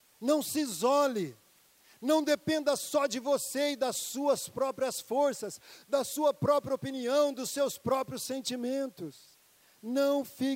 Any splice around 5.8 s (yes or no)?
no